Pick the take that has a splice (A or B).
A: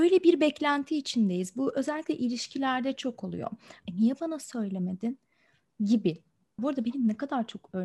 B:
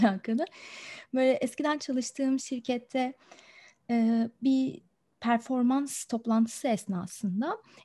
A